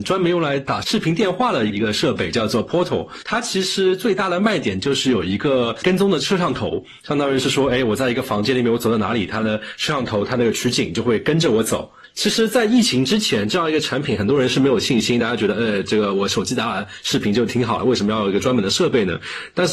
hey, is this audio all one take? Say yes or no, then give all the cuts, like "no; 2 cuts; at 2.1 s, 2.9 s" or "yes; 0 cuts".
yes; 0 cuts